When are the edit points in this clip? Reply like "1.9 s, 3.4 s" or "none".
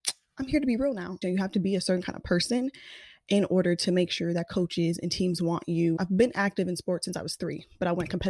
1.2 s, 6.0 s